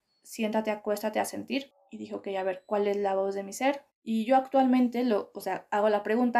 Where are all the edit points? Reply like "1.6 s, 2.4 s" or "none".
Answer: 3.9 s